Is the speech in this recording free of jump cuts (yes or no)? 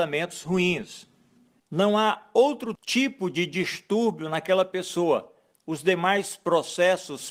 no